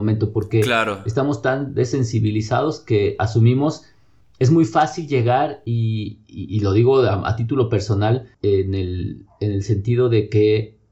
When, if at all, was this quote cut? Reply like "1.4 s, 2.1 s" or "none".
8.3 s